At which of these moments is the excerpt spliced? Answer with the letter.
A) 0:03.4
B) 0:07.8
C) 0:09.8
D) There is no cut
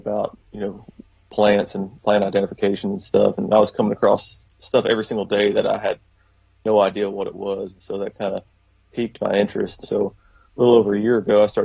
C